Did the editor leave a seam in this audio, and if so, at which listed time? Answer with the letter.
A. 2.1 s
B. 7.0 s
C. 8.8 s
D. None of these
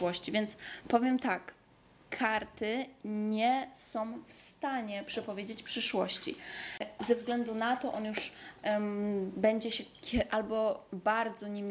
B